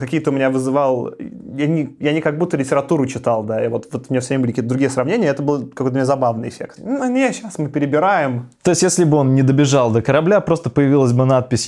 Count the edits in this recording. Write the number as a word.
one